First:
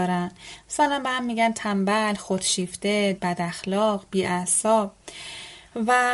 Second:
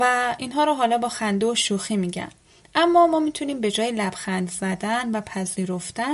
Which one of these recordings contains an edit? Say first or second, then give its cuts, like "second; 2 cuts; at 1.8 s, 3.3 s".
first; 1 cut; at 3.2 s